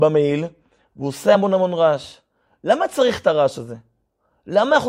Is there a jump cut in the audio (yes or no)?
no